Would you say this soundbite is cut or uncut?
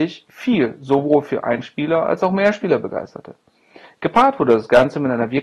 cut